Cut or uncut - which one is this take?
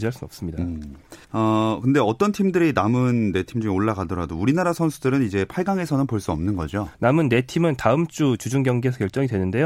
cut